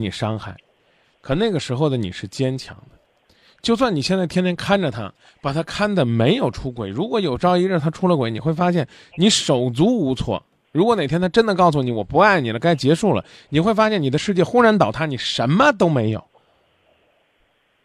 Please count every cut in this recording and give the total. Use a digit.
0